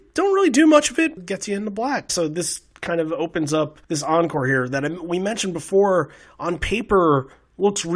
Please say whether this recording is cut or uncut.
cut